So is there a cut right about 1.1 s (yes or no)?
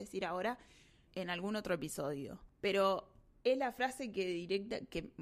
yes